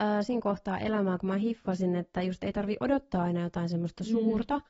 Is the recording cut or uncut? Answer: uncut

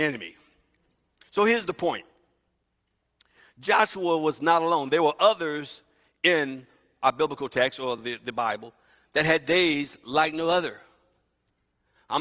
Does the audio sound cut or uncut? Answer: uncut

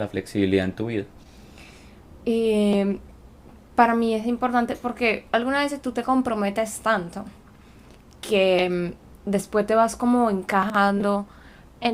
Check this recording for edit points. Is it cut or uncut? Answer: cut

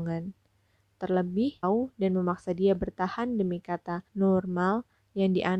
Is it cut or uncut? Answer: cut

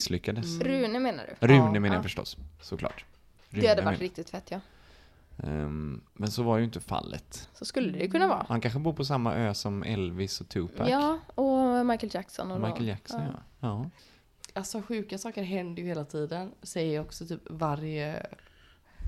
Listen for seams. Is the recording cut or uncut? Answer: cut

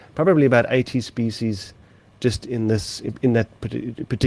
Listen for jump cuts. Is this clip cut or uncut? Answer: uncut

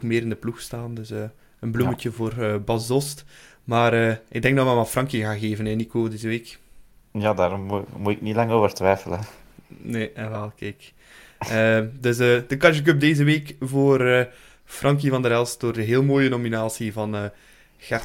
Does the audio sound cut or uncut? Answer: uncut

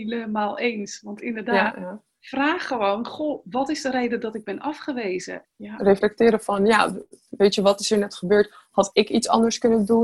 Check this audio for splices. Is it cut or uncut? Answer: cut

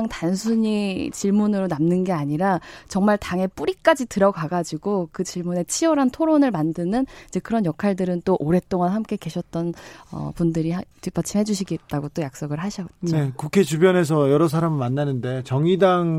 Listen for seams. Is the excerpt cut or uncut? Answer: cut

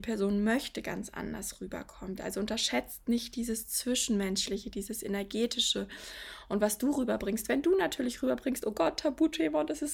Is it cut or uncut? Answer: uncut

